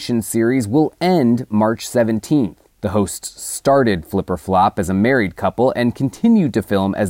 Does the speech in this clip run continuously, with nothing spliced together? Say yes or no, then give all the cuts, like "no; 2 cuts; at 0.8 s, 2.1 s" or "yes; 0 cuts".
yes; 0 cuts